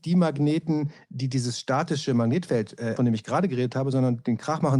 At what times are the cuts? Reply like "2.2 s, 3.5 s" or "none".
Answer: 3.0 s